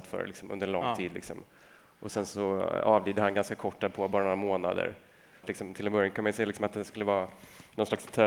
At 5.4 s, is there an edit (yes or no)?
yes